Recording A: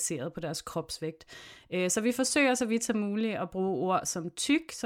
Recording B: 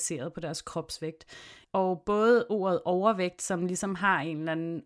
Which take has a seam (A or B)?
B